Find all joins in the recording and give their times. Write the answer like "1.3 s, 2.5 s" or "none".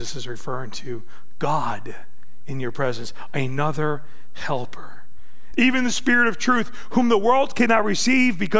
5.5 s